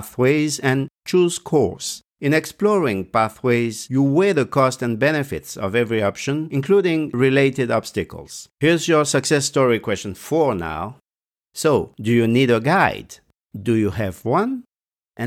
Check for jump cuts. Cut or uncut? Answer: cut